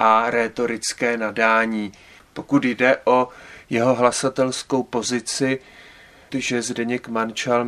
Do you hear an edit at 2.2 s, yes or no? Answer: yes